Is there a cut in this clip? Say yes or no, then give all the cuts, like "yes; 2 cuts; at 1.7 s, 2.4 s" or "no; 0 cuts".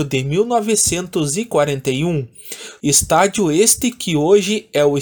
yes; 1 cut; at 2.8 s